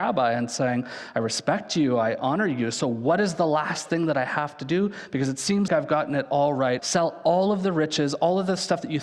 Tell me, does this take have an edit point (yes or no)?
yes